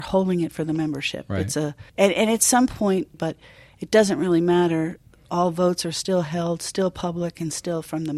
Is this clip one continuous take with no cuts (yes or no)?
no